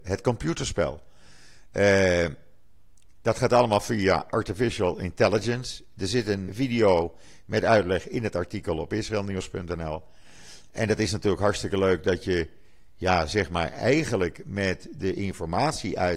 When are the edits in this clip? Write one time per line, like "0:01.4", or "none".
0:06.5